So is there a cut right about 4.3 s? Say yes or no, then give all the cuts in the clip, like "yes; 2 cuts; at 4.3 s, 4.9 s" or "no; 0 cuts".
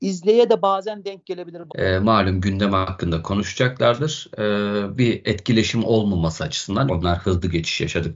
no; 2 cuts; at 1.7 s, 6.9 s